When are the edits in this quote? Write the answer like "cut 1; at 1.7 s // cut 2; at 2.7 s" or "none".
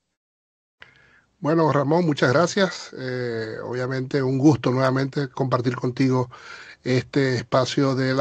none